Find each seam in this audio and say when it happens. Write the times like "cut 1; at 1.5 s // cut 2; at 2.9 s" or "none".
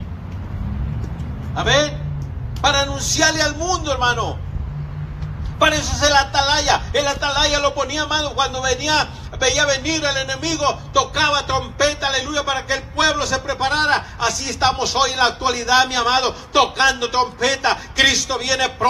none